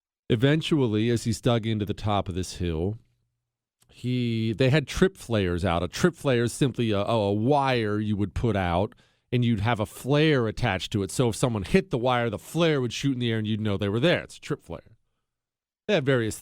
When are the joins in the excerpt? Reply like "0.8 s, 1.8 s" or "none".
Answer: none

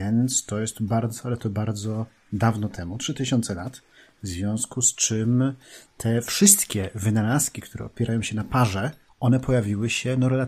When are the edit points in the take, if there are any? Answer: 4.2 s, 9.1 s

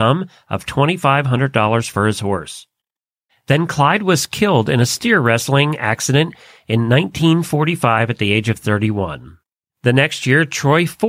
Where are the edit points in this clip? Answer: 3.3 s

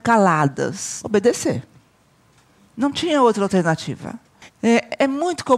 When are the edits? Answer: 1.0 s, 4.5 s

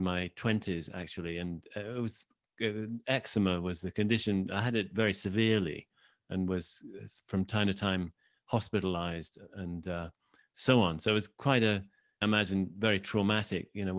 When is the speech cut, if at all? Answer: 12.2 s

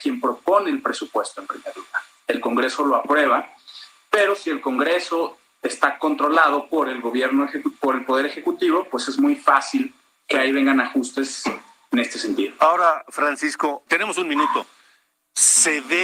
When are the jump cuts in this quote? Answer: 13.9 s

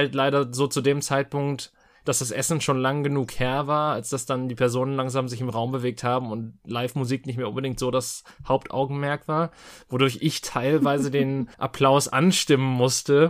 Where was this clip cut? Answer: 11.5 s

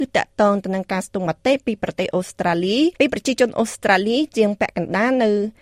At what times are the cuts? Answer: 2.9 s

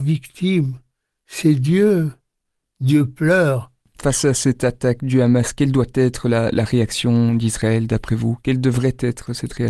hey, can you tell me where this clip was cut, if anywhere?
none

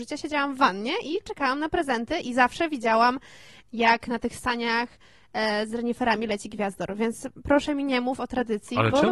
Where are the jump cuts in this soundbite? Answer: none

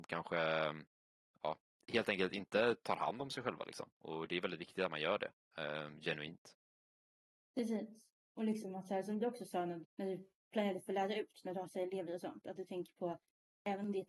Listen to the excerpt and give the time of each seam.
9.8 s

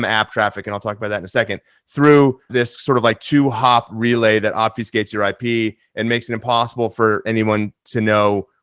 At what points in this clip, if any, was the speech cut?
2.5 s

